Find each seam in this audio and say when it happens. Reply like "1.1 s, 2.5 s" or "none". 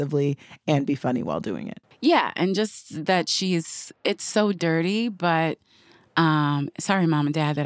none